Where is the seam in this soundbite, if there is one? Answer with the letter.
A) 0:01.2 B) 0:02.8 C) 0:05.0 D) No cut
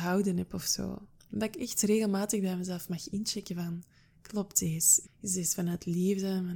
C